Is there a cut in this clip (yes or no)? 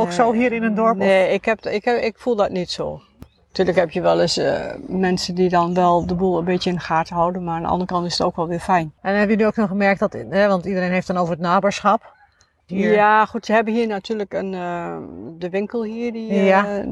yes